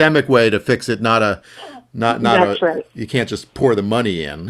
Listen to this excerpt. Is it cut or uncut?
uncut